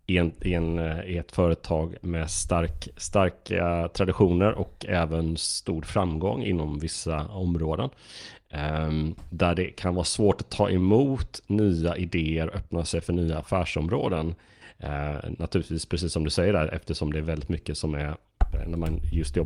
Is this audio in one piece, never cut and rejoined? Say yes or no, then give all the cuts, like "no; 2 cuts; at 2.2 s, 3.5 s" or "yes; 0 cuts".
yes; 0 cuts